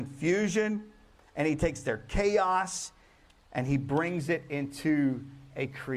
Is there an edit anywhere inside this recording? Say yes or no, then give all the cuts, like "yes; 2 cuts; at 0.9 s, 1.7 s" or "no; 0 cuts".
no; 0 cuts